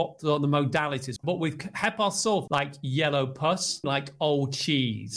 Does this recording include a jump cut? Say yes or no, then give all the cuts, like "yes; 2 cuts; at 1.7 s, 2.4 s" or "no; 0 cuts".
yes; 3 cuts; at 1.2 s, 2.5 s, 3.8 s